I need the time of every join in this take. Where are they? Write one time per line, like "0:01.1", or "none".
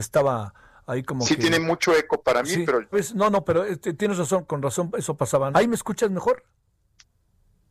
0:02.9
0:05.5